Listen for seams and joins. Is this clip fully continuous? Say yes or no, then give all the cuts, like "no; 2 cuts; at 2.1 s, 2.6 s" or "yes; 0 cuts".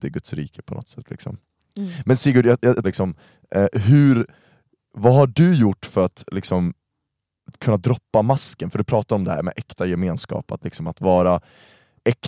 no; 1 cut; at 2.8 s